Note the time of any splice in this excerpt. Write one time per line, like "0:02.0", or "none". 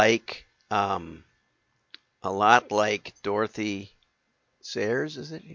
none

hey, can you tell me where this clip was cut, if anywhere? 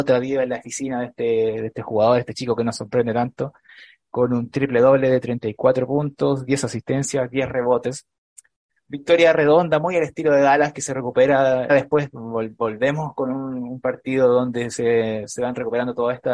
0:11.7

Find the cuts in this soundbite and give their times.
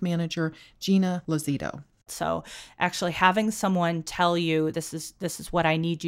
0:02.1
0:04.7

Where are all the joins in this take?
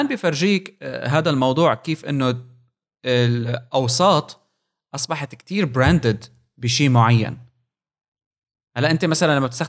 none

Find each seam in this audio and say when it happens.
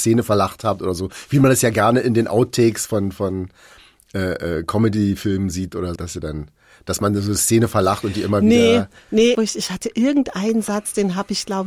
0:06.0
0:09.3

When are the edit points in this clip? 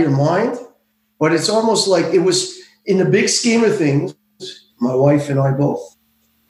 0:04.7

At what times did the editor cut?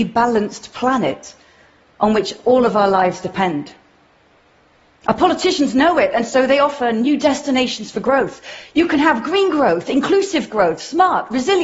none

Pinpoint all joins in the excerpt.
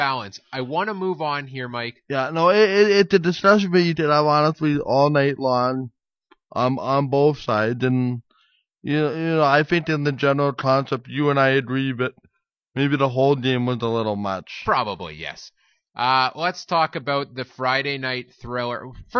none

